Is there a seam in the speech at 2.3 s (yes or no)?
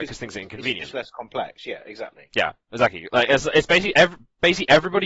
no